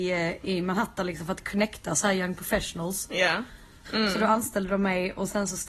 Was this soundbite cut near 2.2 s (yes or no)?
no